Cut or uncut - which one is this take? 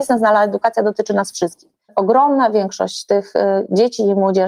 cut